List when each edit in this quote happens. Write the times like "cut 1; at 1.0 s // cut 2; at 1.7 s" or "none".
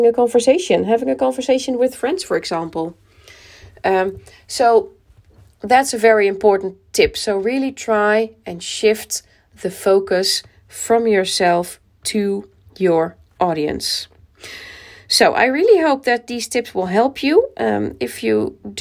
none